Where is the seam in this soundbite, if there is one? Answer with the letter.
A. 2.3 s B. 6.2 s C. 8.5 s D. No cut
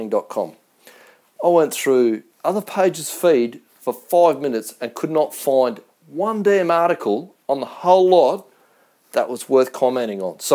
A